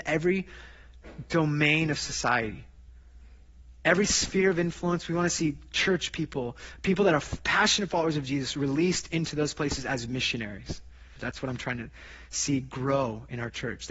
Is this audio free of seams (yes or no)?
no